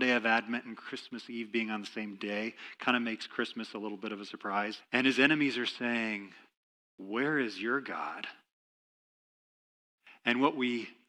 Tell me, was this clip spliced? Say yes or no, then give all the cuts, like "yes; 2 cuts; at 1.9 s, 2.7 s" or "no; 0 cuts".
yes; 1 cut; at 4.8 s